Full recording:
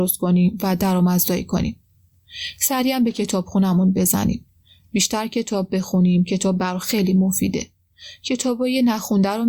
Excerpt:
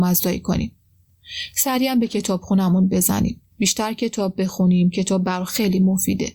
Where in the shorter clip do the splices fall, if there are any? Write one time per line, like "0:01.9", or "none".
0:03.5